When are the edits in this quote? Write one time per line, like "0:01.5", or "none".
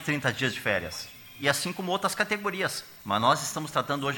0:03.0